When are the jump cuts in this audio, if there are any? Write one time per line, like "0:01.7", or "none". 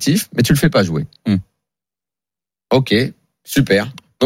none